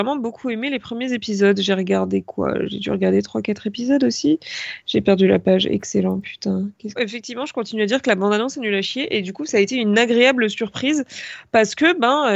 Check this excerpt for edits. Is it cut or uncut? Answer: cut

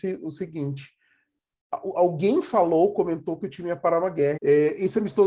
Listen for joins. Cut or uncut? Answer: cut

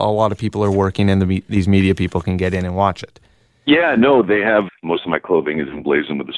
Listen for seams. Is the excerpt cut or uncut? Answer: cut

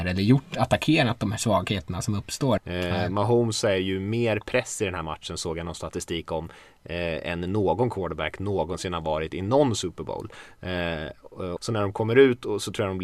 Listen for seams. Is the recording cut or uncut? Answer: cut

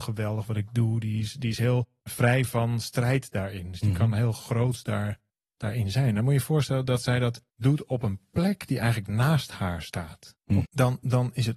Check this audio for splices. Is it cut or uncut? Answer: cut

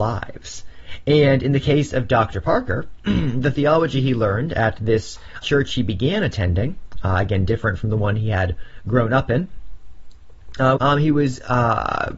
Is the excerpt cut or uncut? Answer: cut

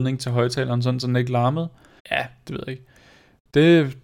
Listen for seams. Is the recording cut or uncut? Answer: cut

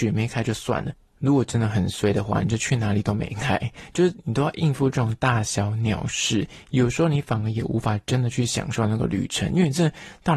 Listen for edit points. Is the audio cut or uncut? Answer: uncut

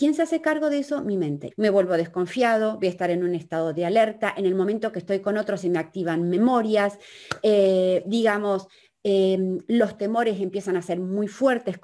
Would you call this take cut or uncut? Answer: cut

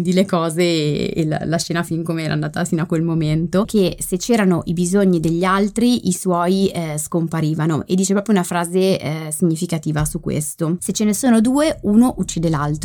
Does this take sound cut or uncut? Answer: cut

